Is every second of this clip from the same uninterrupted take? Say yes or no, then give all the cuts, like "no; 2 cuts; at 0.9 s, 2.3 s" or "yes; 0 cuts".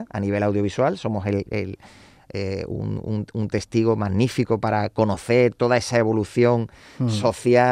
yes; 0 cuts